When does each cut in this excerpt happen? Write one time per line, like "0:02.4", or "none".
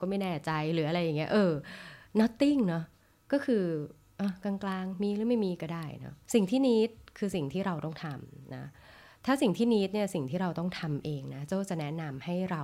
0:06.2